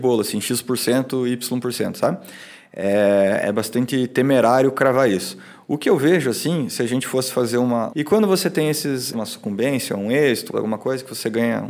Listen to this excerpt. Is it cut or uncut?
cut